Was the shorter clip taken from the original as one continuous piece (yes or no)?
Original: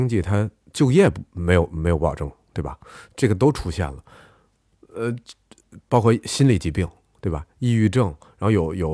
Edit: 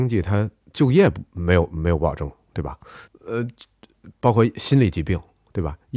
no